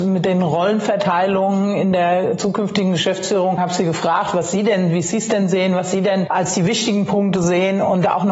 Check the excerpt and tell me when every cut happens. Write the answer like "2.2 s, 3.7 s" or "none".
3.6 s

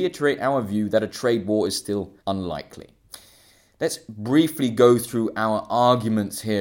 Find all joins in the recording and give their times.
2.2 s

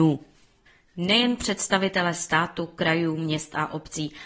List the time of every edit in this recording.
none

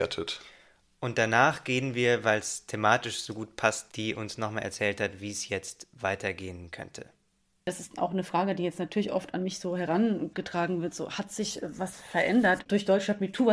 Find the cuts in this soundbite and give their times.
3.9 s

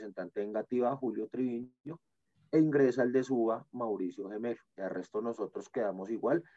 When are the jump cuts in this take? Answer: 4.8 s

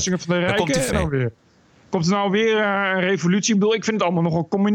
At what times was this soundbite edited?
0.9 s

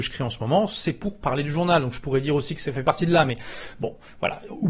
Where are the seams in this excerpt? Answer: none

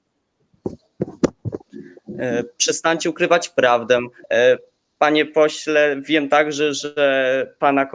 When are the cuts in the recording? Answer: 2.6 s, 4.2 s

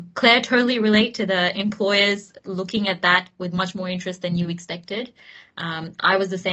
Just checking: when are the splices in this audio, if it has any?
none

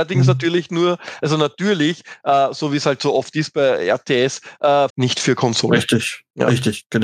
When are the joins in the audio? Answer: 4.9 s

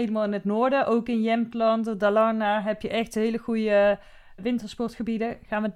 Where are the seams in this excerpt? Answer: 4.4 s

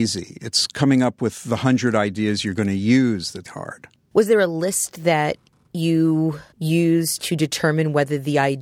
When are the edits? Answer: 3.5 s, 6.5 s

